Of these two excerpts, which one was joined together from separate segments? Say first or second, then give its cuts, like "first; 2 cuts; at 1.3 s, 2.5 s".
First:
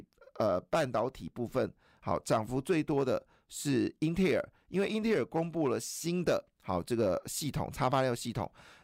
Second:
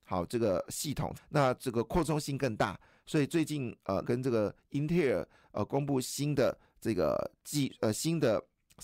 second; 2 cuts; at 1.1 s, 4.0 s